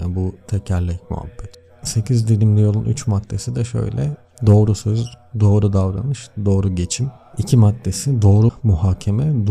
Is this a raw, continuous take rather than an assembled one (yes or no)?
yes